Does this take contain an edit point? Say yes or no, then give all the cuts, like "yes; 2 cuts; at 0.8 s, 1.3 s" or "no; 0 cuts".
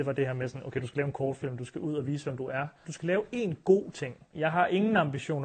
yes; 2 cuts; at 2.8 s, 4.3 s